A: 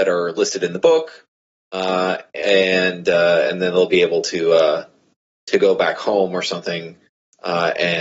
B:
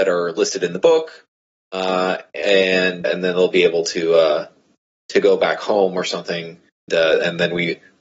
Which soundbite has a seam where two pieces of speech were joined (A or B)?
B